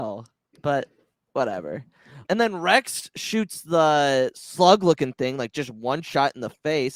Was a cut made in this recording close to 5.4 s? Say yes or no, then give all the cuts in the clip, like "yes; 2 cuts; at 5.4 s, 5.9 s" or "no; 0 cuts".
no; 1 cut; at 2.2 s